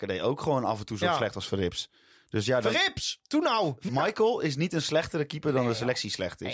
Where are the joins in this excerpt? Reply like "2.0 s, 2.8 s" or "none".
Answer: 3.9 s